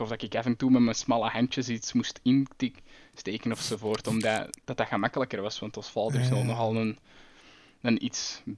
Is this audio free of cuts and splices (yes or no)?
yes